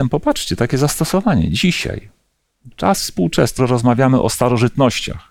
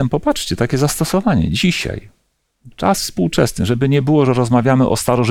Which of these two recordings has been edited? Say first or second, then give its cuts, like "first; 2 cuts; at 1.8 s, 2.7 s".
first; 1 cut; at 3.6 s